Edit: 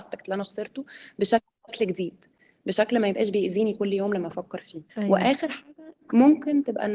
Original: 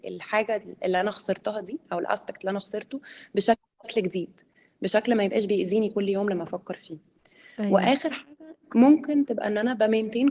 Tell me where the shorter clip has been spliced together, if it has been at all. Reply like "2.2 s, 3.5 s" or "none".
4.9 s